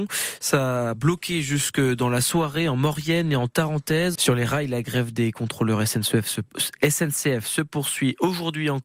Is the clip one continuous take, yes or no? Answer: no